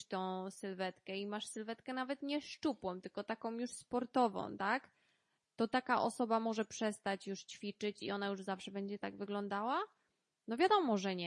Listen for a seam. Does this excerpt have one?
no; 0 cuts

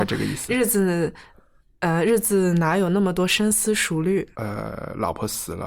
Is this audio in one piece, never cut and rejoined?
no; 1 cut; at 4.3 s

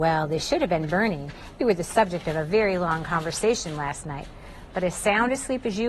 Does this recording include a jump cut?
no; 0 cuts

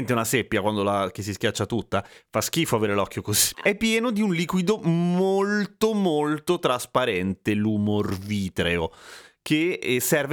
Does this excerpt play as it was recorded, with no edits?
no; 1 cut; at 3.5 s

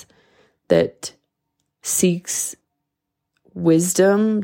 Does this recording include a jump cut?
no; 0 cuts

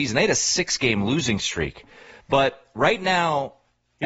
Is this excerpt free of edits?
yes; 0 cuts

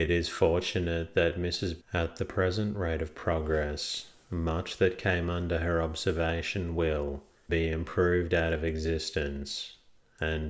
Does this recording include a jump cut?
yes; 2 cuts; at 1.8 s, 7.5 s

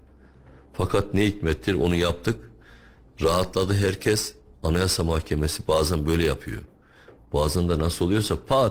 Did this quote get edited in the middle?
yes; 1 cut; at 7.2 s

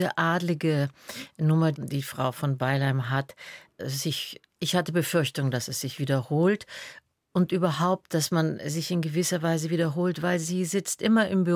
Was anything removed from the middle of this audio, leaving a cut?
no; 0 cuts

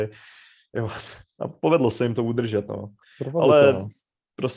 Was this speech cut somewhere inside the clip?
no; 0 cuts

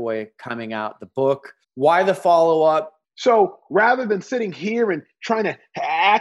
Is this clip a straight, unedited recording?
no; 2 cuts; at 1.6 s, 3.0 s

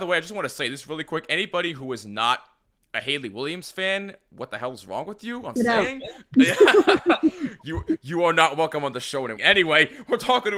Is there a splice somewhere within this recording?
yes; 2 cuts; at 5.6 s, 9.4 s

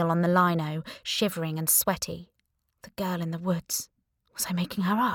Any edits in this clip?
no; 0 cuts

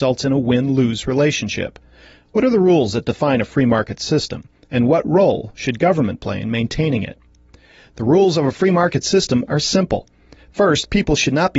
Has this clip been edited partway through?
no; 0 cuts

